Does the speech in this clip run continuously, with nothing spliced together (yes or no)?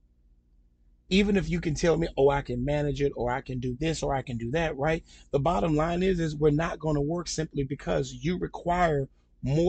yes